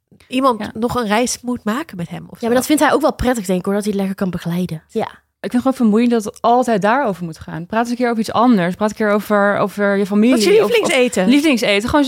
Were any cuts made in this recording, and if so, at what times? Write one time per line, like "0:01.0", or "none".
0:04.9